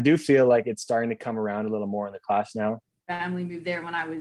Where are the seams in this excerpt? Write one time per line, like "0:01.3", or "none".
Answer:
0:03.0